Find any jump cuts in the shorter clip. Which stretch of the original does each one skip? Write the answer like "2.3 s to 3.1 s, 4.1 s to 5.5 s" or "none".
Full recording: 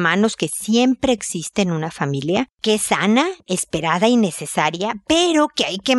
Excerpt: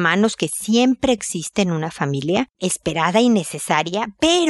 2.5 s to 3.4 s